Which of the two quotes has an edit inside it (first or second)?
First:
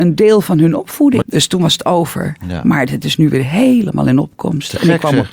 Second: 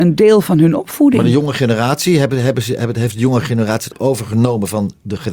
first